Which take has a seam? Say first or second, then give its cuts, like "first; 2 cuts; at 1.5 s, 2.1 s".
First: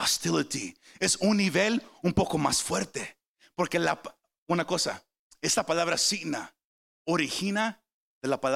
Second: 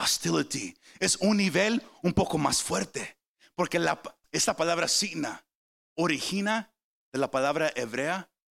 second; 1 cut; at 4.2 s